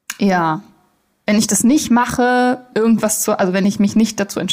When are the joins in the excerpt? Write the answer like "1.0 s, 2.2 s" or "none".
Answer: 2.7 s